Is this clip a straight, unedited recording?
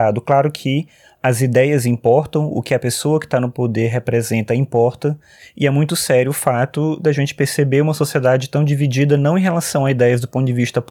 yes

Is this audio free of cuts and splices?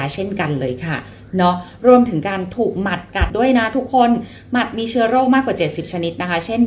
no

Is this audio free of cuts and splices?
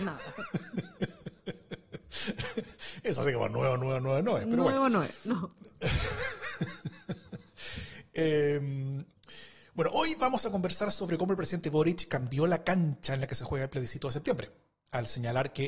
yes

